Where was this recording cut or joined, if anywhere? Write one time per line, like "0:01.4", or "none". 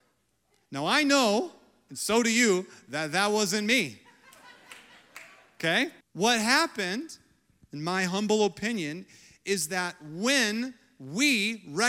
0:06.0